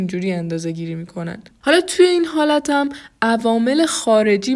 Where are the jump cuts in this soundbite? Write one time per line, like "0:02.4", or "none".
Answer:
0:01.5

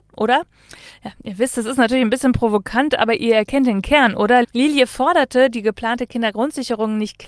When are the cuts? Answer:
0:04.4

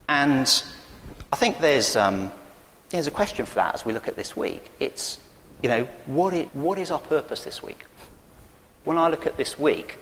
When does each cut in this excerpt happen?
0:06.5
0:08.8

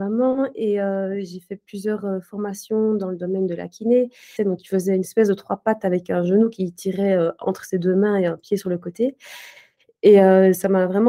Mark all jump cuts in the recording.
0:04.4

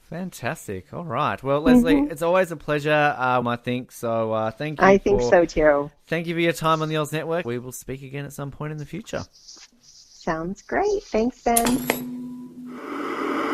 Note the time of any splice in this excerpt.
0:03.4
0:07.4

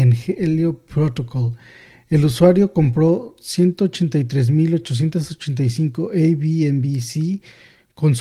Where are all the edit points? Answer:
none

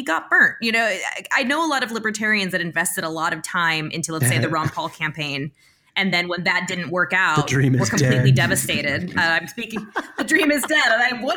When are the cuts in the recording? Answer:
none

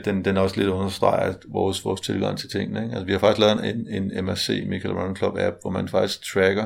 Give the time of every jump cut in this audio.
none

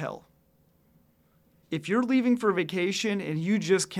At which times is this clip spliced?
0:01.6

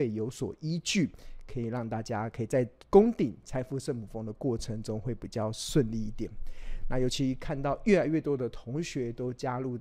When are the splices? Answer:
none

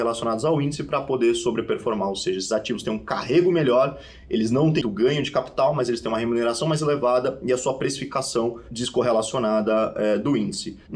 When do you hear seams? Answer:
0:04.8

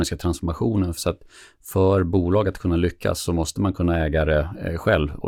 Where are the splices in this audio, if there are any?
0:01.0

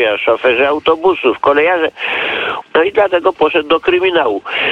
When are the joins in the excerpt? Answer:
0:02.6

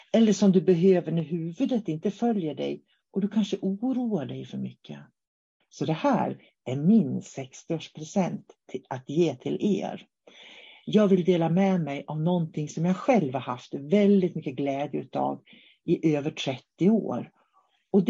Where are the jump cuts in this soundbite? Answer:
0:05.6

